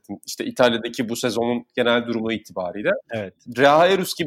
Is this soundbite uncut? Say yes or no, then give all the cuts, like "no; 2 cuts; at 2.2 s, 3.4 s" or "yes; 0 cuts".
yes; 0 cuts